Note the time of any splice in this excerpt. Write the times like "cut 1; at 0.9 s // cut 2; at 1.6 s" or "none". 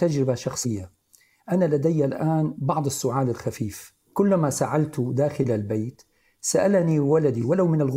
none